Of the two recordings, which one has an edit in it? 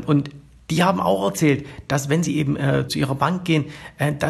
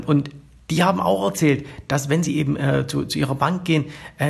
first; 1 cut; at 2.9 s

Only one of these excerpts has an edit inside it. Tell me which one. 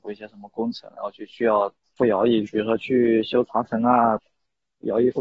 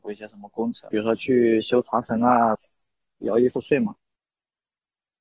second; 1 cut; at 0.9 s

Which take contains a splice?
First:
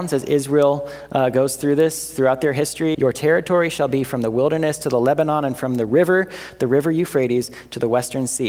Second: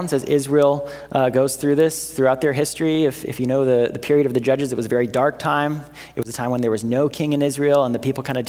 first; 1 cut; at 2.9 s

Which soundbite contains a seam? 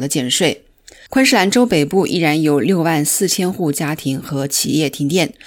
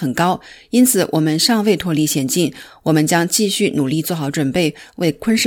first; 1 cut; at 1.1 s

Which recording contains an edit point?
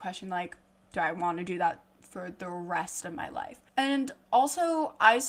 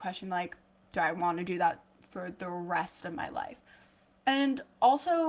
first; 1 cut; at 3.7 s

